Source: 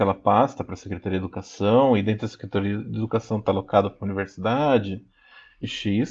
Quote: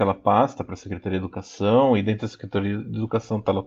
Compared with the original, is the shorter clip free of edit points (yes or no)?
yes